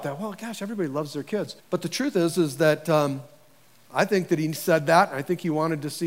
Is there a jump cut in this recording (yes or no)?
yes